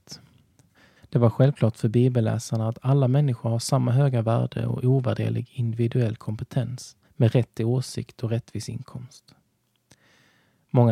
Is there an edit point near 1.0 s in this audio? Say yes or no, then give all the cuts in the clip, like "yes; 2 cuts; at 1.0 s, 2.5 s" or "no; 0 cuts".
yes; 2 cuts; at 1.0 s, 7.0 s